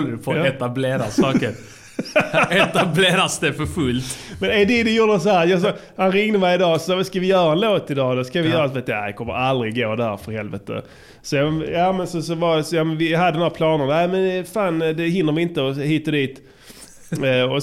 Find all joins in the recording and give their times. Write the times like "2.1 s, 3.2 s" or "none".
none

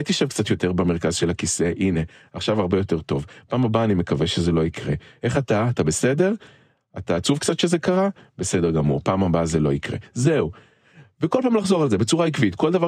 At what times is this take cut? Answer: none

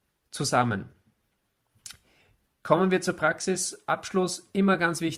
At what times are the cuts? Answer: none

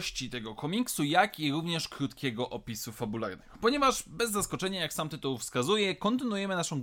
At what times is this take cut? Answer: none

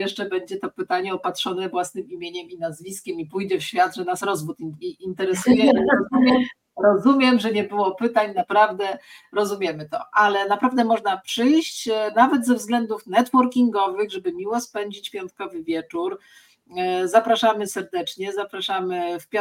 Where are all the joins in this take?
4.8 s

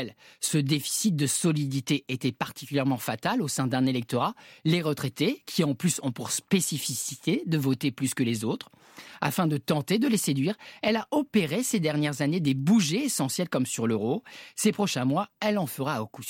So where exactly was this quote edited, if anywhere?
none

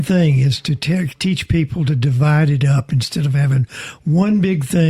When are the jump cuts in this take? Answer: none

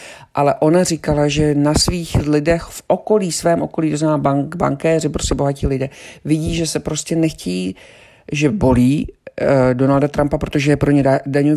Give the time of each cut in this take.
none

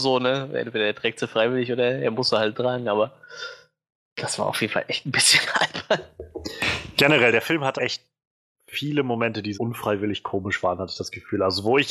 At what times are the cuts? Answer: 7.8 s, 9.5 s

